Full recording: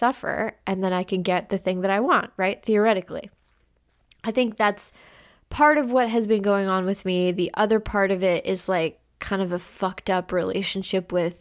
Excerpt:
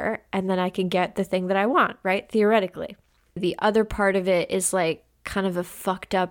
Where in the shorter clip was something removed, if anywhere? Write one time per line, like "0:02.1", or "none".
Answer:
0:03.4